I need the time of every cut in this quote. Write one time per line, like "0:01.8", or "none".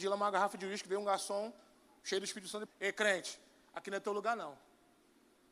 0:02.7